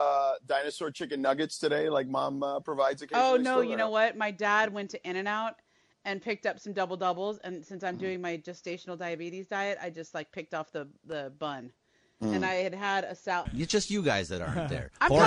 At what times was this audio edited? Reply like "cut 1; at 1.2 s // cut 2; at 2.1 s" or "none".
cut 1; at 13.5 s